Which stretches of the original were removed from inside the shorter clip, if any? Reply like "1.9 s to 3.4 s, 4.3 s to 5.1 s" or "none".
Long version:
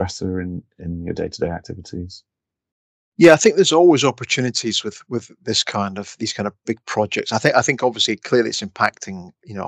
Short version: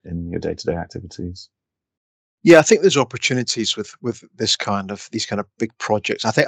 3.6 s to 4.0 s